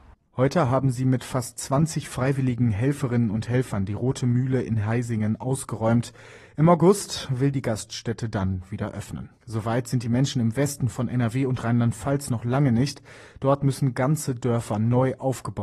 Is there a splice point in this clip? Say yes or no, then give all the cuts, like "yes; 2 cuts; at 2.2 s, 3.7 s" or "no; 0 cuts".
yes; 1 cut; at 9.4 s